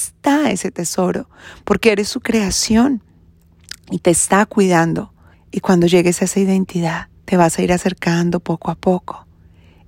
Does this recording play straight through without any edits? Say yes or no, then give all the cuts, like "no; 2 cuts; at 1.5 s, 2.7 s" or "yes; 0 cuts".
no; 2 cuts; at 5.3 s, 7.2 s